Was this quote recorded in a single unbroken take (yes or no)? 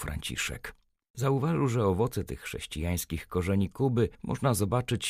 no